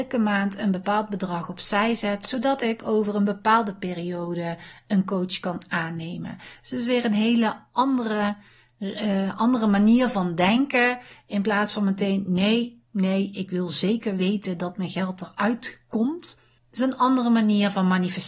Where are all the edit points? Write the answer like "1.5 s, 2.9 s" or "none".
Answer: none